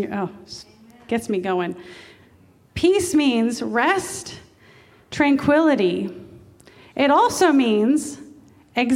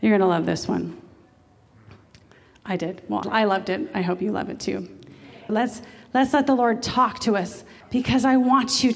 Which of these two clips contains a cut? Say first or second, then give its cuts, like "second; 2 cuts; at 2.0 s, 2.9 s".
second; 3 cuts; at 3.2 s, 5.5 s, 7.8 s